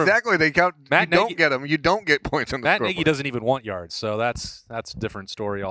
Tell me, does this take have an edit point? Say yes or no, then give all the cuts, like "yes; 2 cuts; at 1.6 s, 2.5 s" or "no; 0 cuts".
no; 0 cuts